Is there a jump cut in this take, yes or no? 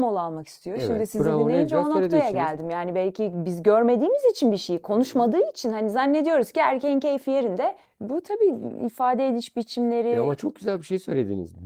yes